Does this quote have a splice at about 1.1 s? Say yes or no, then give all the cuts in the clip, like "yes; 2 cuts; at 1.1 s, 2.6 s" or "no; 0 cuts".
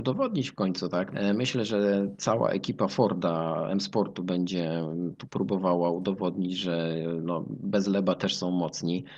yes; 1 cut; at 1.1 s